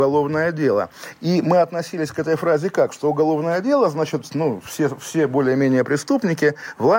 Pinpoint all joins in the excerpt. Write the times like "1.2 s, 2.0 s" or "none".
none